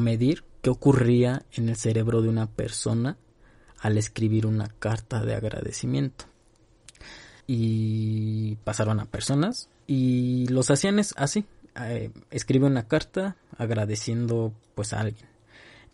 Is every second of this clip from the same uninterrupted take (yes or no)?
no